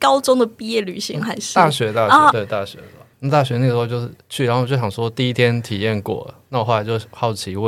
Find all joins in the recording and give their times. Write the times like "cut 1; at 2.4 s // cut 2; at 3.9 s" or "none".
cut 1; at 2.3 s